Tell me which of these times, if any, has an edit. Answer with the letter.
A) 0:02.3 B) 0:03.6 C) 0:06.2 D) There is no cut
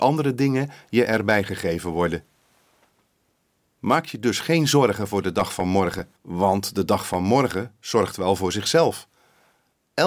C